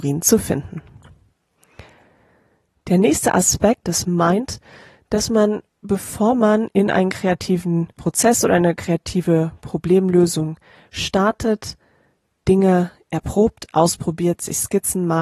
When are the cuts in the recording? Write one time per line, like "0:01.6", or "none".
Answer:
0:03.8
0:07.9